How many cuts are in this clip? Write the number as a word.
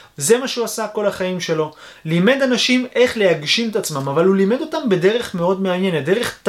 zero